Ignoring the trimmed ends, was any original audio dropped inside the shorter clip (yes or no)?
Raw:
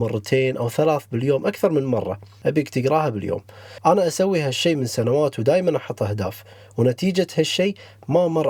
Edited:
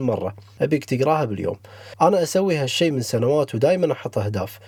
no